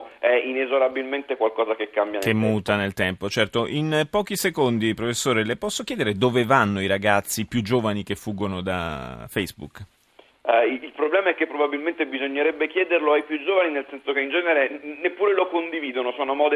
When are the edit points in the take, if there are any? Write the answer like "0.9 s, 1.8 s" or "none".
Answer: none